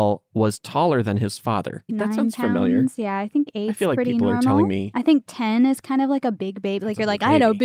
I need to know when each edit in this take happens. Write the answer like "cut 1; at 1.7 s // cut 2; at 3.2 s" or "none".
cut 1; at 1.9 s